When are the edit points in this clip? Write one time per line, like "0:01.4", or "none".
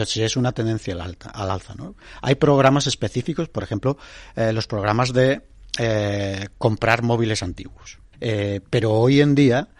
0:08.1

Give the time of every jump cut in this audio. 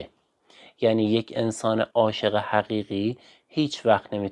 0:01.9

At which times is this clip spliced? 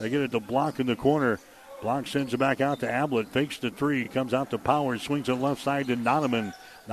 none

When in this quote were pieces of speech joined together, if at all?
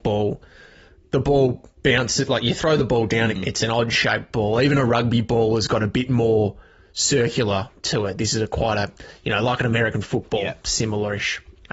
0:03.4

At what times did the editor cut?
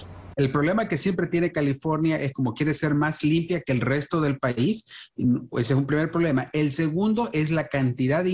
none

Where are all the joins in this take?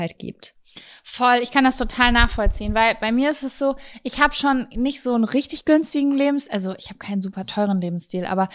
none

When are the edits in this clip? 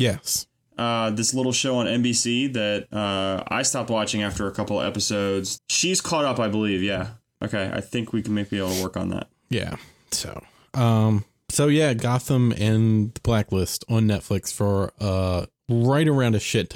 0:05.6
0:07.3

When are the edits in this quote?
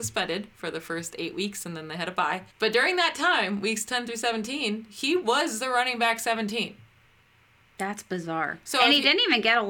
0:02.5

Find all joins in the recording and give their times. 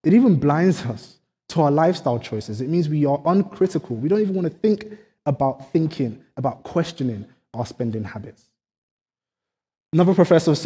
none

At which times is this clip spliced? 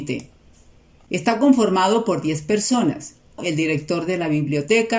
0:03.4

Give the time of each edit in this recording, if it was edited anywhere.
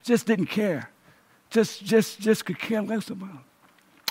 none

